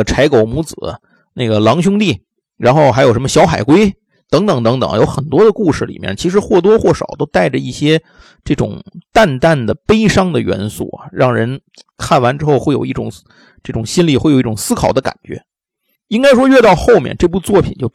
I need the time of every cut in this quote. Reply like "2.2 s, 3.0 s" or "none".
none